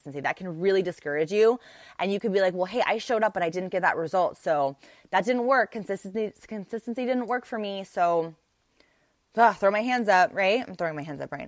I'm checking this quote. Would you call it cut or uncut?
uncut